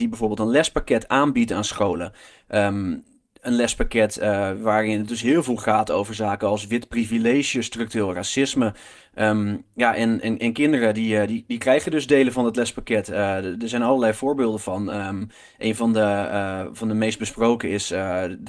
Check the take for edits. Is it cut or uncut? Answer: uncut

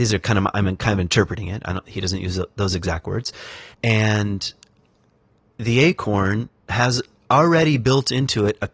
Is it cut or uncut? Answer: cut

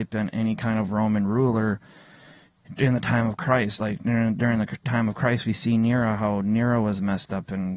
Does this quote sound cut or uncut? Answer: uncut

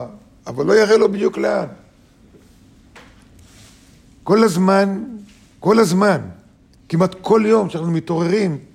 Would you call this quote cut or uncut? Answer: uncut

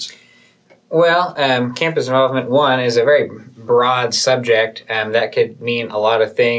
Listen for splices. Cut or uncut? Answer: uncut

